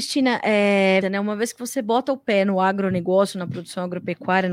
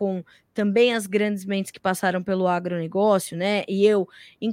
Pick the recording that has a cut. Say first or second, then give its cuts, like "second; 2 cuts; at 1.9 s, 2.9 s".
first; 1 cut; at 1.0 s